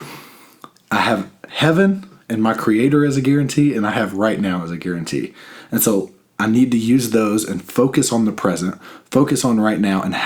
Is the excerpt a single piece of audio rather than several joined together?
no; 1 cut; at 2.3 s

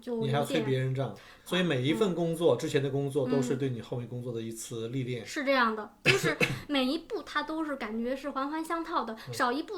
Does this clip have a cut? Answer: yes; 1 cut; at 1.5 s

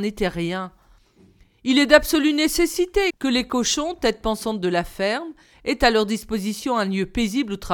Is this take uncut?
no; 1 cut; at 3.1 s

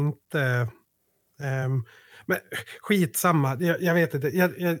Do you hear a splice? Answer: no; 0 cuts

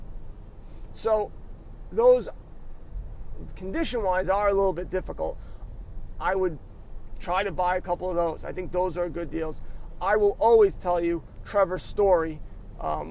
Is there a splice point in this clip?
no; 0 cuts

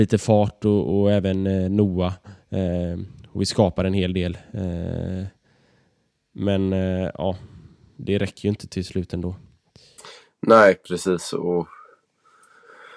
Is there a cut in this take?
no; 0 cuts

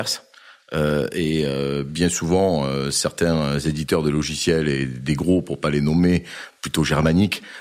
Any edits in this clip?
no; 0 cuts

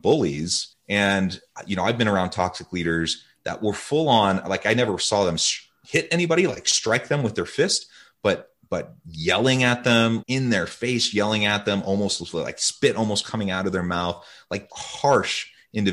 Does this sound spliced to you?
yes; 2 cuts; at 10.2 s, 14.7 s

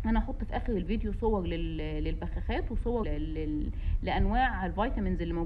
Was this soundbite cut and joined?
yes; 1 cut; at 3.0 s

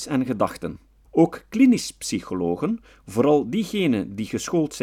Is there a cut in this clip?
yes; 1 cut; at 1.0 s

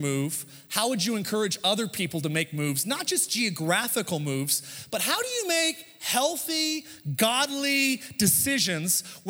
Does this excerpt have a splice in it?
no; 0 cuts

